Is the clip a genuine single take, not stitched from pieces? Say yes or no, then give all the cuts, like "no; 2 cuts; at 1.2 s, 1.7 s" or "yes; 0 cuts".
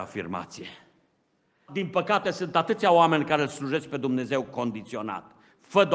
no; 1 cut; at 1.7 s